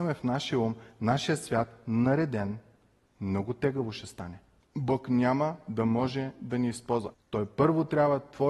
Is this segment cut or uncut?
cut